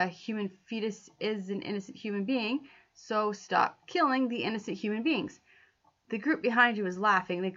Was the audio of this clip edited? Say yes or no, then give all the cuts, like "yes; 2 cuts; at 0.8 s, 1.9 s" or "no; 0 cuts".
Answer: no; 0 cuts